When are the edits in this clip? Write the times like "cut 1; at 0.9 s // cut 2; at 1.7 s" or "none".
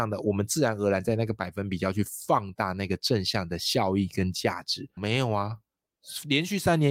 cut 1; at 5.0 s

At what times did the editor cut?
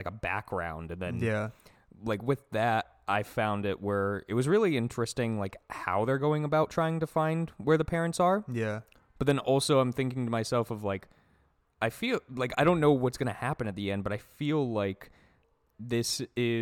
none

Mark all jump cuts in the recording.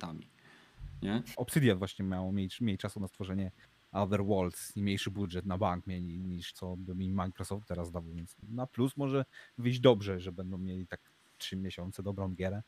cut 1; at 1.3 s // cut 2; at 6.5 s

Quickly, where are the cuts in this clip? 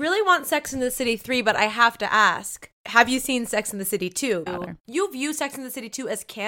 cut 1; at 2.8 s // cut 2; at 4.5 s

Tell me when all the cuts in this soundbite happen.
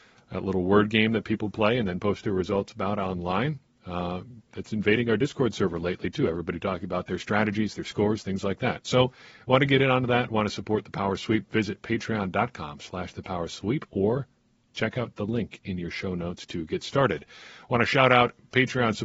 none

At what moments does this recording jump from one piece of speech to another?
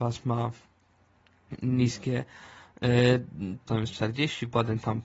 cut 1; at 3.7 s

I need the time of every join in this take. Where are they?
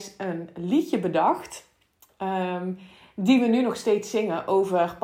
none

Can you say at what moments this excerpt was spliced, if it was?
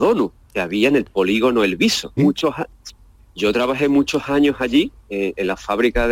cut 1; at 2.2 s

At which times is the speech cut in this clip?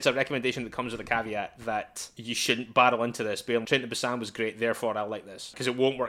cut 1; at 3.6 s

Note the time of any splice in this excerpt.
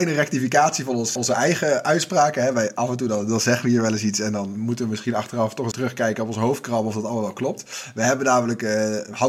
cut 1; at 1.2 s // cut 2; at 5.7 s

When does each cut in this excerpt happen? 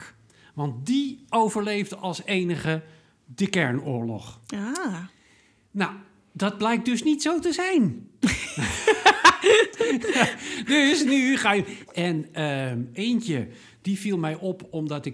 cut 1; at 4.4 s // cut 2; at 11.9 s

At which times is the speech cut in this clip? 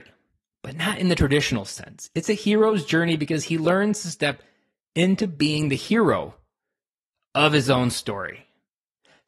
none

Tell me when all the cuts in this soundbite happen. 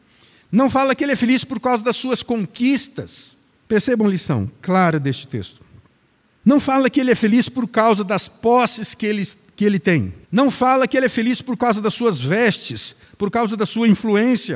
cut 1; at 3.6 s // cut 2; at 6.3 s // cut 3; at 10.2 s

